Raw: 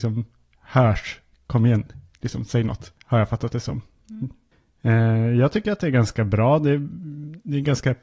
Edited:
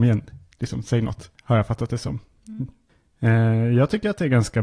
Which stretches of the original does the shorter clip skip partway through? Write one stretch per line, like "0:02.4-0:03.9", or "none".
none